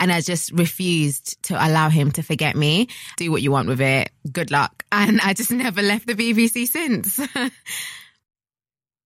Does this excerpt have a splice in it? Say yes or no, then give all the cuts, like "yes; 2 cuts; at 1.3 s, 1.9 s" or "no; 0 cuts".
yes; 1 cut; at 3.2 s